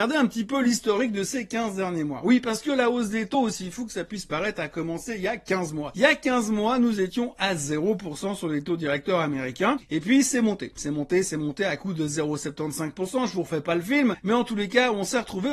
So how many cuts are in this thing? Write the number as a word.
zero